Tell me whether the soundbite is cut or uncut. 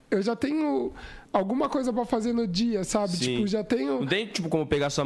cut